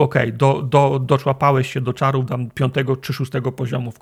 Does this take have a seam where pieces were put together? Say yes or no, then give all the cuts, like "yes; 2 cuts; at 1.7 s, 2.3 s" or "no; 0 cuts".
no; 0 cuts